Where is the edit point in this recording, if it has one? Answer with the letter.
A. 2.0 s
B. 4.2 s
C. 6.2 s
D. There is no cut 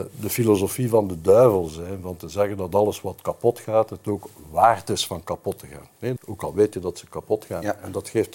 C